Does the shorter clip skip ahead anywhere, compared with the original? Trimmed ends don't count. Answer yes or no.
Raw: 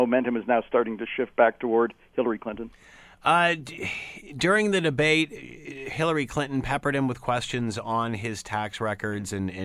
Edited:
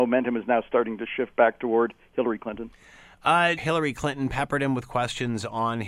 yes